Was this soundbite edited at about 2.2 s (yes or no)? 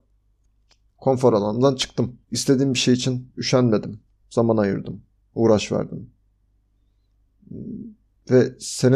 yes